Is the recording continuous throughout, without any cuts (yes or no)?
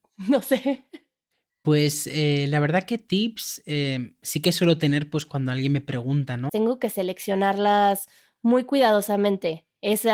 no